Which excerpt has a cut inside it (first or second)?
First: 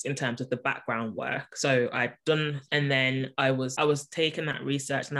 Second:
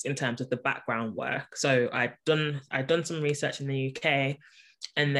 first